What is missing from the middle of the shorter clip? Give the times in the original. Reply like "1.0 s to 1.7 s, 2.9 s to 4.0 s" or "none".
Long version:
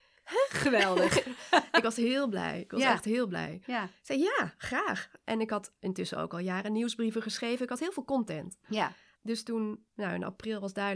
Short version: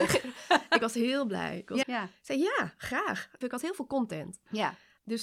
2.8 s to 3.6 s, 5.2 s to 7.6 s